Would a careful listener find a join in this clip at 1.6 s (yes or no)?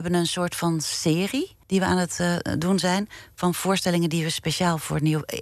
yes